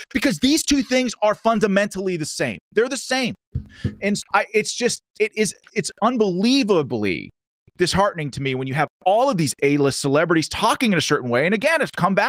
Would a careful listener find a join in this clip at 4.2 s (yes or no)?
yes